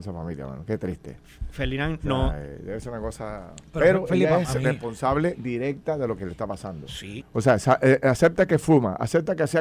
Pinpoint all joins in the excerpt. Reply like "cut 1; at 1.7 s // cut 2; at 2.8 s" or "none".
cut 1; at 7.2 s